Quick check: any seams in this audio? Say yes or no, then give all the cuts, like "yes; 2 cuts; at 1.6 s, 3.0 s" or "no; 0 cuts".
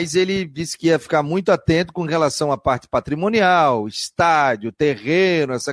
no; 0 cuts